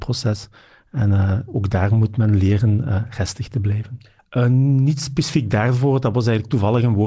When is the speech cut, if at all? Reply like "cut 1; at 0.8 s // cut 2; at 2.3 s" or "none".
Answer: cut 1; at 4.2 s